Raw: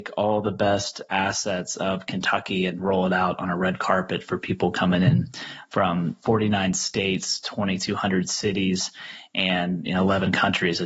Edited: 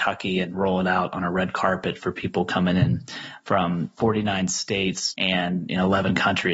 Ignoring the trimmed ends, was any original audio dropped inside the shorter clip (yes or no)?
yes